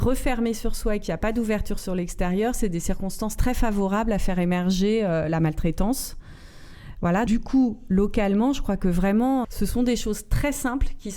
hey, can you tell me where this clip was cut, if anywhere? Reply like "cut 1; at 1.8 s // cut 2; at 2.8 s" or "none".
cut 1; at 7.3 s // cut 2; at 9.4 s